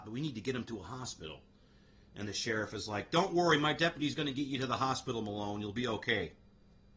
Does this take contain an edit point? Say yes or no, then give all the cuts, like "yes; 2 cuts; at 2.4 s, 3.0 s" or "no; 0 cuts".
no; 0 cuts